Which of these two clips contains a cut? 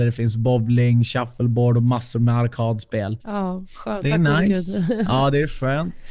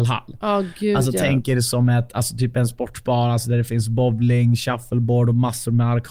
first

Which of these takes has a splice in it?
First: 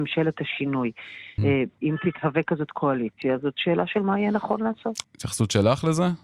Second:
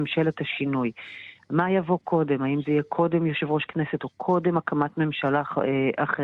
first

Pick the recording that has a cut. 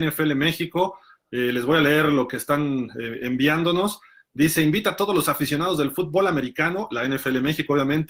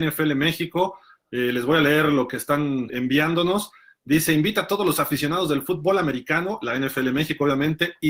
second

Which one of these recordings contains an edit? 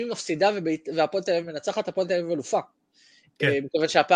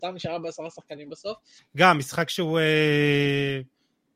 second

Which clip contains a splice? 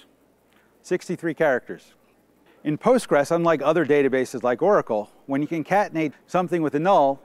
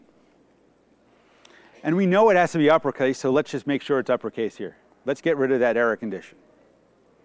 first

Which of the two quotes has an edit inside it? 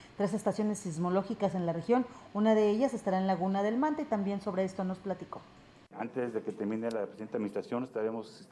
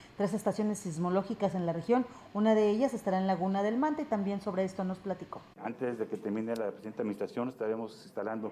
second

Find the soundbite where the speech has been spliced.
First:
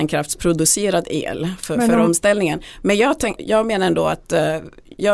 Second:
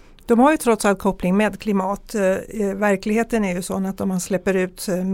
first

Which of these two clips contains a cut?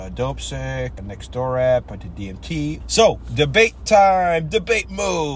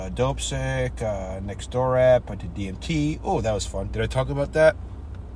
first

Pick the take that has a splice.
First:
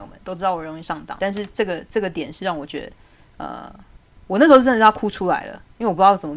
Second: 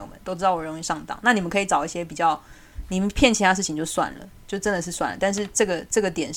first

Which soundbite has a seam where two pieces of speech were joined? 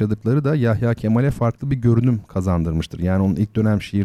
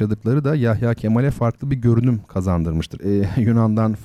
second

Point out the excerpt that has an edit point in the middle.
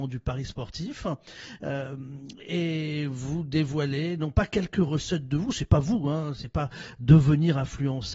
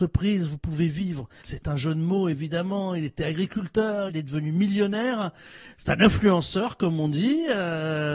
second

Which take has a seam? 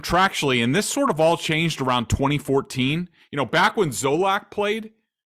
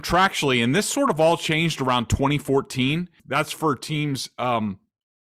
second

